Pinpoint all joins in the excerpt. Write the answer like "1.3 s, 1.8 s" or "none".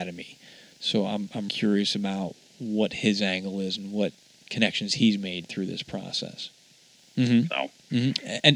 1.5 s, 7.0 s